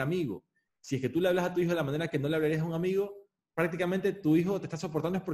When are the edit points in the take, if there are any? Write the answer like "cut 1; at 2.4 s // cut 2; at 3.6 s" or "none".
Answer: cut 1; at 3.4 s